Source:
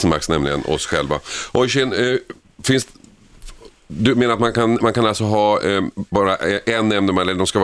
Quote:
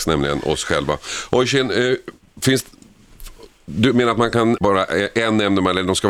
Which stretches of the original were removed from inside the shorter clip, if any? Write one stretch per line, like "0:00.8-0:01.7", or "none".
0:04.8-0:06.1